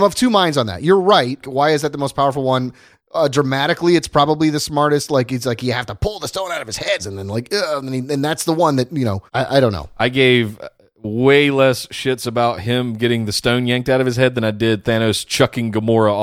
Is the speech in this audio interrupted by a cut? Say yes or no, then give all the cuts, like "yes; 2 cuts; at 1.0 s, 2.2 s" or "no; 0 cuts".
yes; 3 cuts; at 1.4 s, 7.0 s, 9.3 s